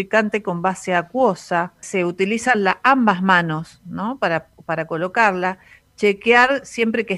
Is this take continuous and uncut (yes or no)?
no